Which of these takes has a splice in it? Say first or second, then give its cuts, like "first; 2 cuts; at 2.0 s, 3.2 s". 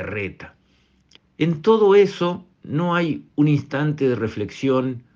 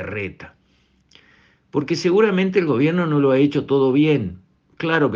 first; 2 cuts; at 1.2 s, 2.5 s